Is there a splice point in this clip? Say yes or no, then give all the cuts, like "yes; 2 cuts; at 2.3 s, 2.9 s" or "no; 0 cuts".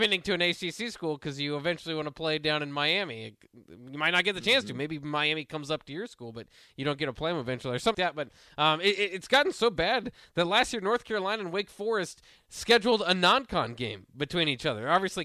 yes; 1 cut; at 7.9 s